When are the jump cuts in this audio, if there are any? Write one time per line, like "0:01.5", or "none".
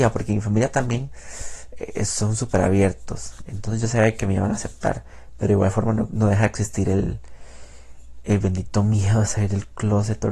none